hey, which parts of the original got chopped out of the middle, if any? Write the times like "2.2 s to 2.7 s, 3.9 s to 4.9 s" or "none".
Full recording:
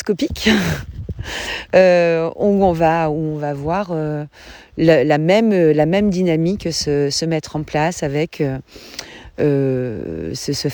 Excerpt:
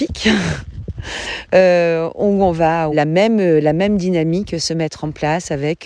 3.1 s to 5.0 s, 6.7 s to 7.1 s